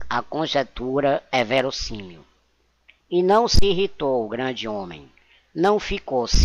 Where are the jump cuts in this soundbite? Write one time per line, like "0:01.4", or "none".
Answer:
0:03.0